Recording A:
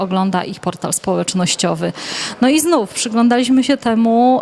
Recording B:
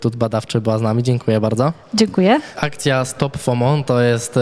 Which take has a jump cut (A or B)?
B